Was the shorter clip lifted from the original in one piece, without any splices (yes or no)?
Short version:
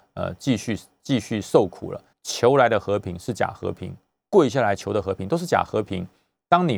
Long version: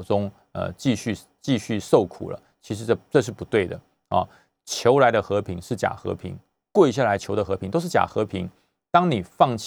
no